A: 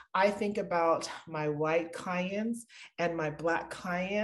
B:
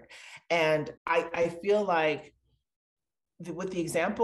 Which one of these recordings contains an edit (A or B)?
B